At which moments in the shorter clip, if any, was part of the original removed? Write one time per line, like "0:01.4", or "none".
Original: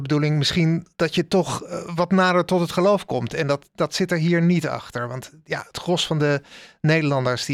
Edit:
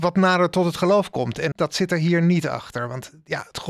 0:01.5